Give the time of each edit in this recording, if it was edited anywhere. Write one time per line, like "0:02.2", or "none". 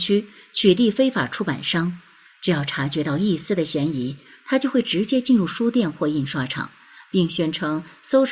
none